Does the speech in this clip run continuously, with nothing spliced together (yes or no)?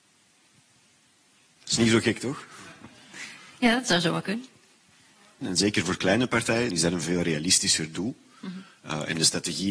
no